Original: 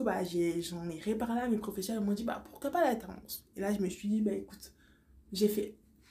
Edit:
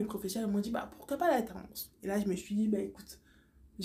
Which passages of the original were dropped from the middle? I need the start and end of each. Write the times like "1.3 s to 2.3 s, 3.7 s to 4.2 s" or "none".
none